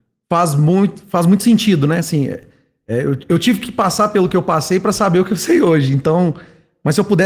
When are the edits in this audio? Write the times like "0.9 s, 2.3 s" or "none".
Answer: none

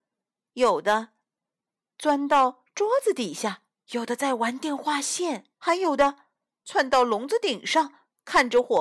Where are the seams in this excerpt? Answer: 3.9 s, 5.5 s

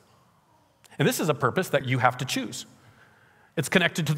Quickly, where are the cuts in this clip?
1.8 s

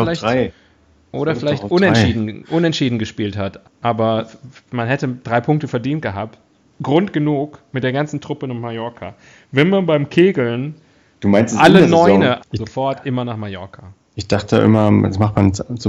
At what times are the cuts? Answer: 3.6 s, 12.4 s

